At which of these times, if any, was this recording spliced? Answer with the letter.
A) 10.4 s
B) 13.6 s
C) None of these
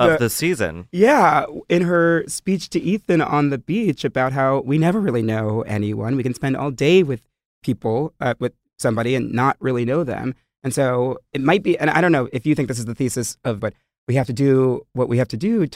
B